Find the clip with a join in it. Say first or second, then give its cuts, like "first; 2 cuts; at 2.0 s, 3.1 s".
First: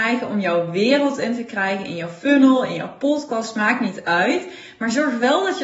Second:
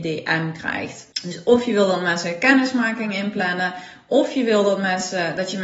second; 1 cut; at 1.1 s